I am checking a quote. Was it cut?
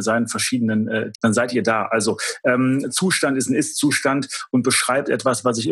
yes; 1 cut; at 1.1 s

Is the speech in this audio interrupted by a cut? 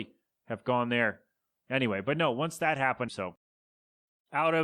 yes; 1 cut; at 3.1 s

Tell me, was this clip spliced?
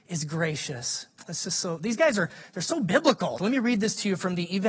yes; 2 cuts; at 1.3 s, 3.4 s

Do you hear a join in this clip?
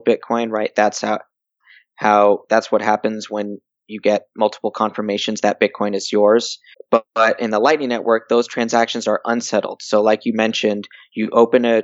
yes; 1 cut; at 6.7 s

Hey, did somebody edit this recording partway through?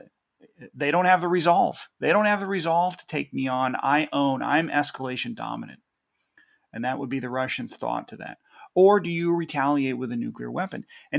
no; 0 cuts

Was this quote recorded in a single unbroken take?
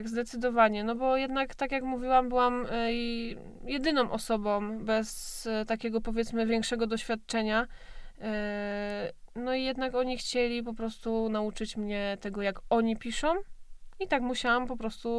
yes; 0 cuts

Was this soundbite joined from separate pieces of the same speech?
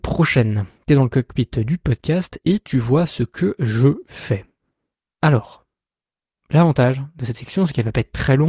no; 0 cuts

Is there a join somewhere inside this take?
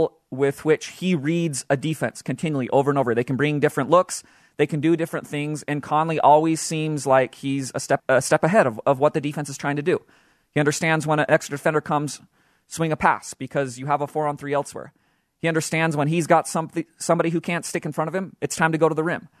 yes; 1 cut; at 8.0 s

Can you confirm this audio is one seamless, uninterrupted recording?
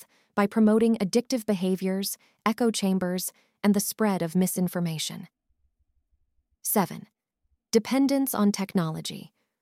yes; 0 cuts

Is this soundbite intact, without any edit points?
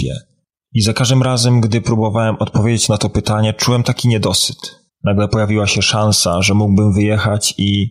no; 1 cut; at 4.9 s

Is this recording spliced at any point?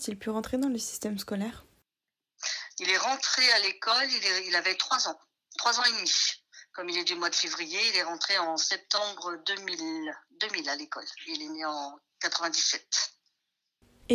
no; 0 cuts

